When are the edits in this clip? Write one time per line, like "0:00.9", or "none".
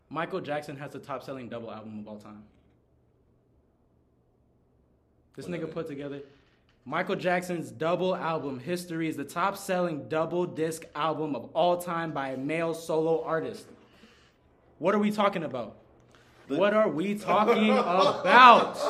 0:16.4